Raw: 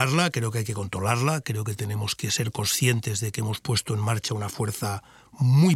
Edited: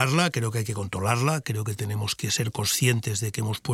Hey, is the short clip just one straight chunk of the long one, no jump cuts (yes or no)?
yes